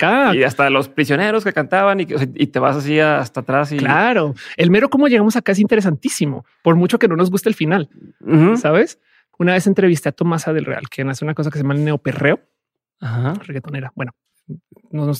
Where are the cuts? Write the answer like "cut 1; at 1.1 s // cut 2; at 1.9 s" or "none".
cut 1; at 9.3 s